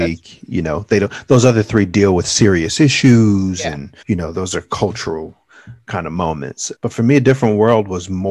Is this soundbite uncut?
no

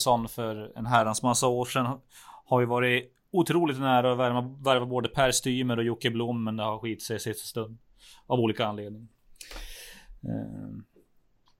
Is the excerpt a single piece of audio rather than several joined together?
yes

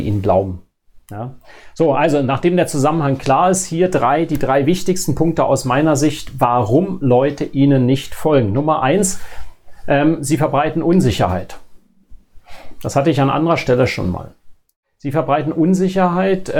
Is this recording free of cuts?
yes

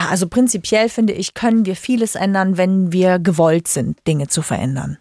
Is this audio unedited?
yes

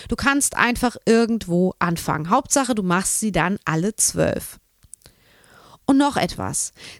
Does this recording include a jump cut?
no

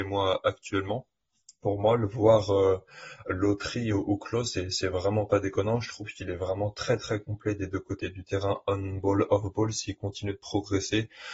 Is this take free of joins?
yes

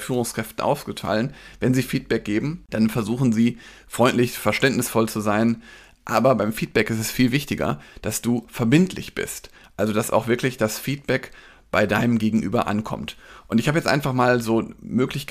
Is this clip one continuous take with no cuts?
yes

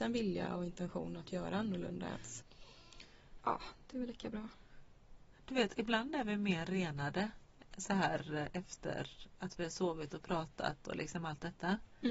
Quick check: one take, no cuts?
no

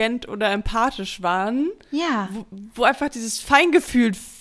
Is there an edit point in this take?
no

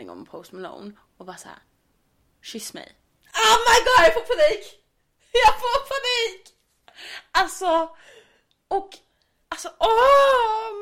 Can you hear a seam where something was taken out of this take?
no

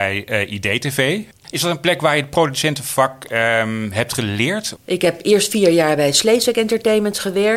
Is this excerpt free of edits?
no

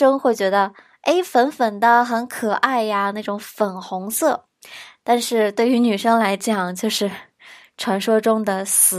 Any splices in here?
no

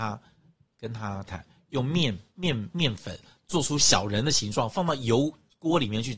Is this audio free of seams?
no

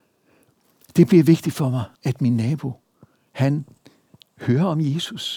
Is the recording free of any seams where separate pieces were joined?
no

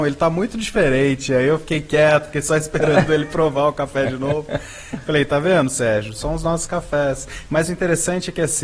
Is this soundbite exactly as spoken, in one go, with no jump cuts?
yes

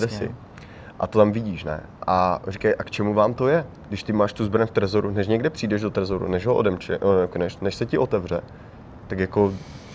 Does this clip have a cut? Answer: no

